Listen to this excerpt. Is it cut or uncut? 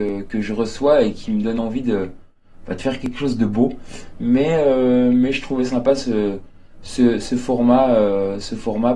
cut